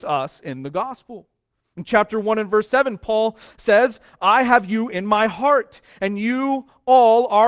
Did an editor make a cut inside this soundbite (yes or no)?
no